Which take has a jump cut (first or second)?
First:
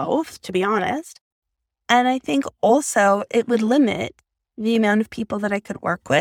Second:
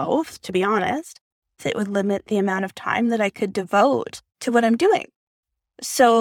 second